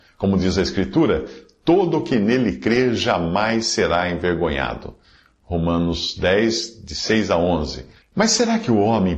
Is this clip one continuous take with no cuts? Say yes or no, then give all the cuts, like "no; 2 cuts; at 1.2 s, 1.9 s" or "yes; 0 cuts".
no; 1 cut; at 8.0 s